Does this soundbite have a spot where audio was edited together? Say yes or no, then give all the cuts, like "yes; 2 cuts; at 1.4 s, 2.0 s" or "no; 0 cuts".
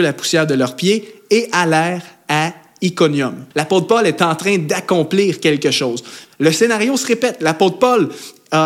yes; 2 cuts; at 3.5 s, 6.2 s